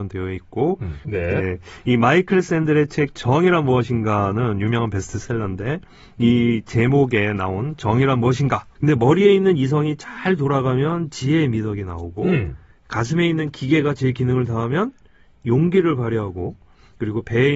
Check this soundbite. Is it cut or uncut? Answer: cut